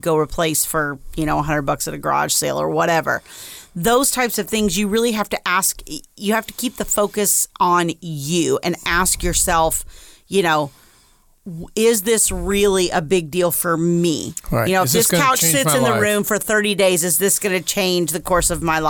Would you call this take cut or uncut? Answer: uncut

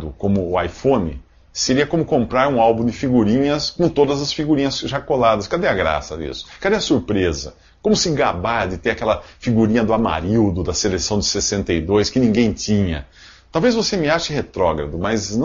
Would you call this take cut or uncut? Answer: uncut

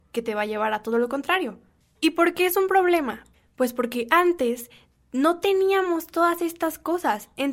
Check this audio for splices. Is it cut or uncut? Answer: uncut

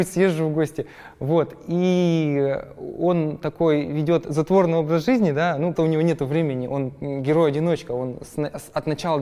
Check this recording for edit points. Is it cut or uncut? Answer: cut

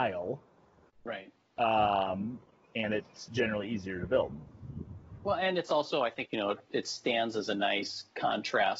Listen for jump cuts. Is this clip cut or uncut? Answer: cut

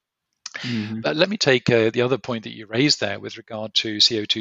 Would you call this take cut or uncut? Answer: uncut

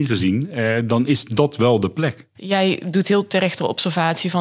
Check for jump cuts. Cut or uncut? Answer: cut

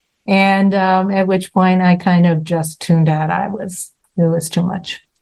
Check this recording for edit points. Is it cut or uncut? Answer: cut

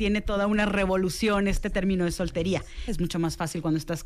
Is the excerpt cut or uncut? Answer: cut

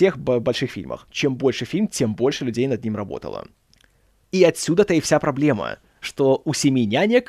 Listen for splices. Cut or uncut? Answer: uncut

